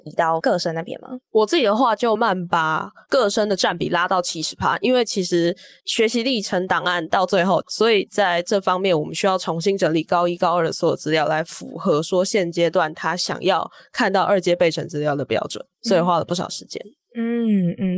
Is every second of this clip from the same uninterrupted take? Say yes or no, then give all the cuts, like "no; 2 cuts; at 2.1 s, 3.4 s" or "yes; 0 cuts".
no; 2 cuts; at 2.2 s, 7.6 s